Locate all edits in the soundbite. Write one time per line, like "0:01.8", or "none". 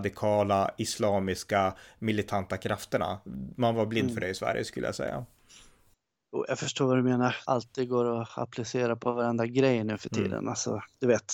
0:07.4